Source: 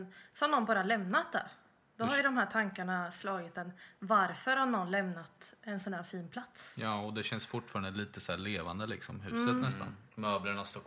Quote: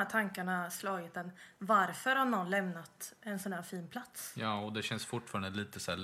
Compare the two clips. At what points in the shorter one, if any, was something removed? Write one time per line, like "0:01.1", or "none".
none